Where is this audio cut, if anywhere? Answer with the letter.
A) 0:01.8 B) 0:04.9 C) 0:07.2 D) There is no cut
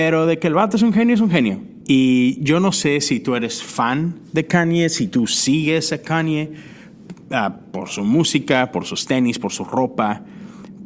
A